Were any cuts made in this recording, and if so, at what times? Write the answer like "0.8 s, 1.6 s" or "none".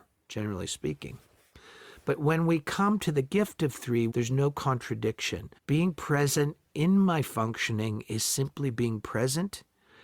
4.1 s, 5.6 s